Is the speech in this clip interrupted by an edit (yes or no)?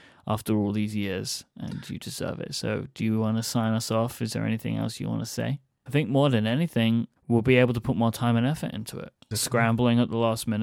yes